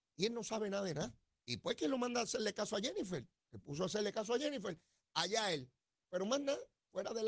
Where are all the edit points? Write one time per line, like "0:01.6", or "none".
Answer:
0:01.4
0:06.0